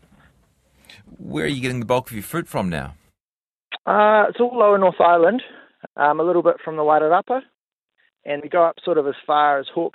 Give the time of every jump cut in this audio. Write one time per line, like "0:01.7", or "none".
0:05.9
0:08.4